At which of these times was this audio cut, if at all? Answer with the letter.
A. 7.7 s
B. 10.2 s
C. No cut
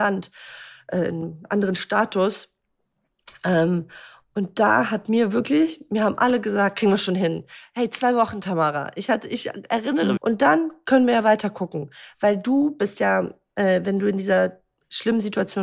B